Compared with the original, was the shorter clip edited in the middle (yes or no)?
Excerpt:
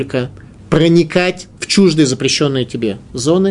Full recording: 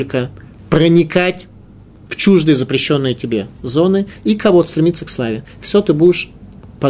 yes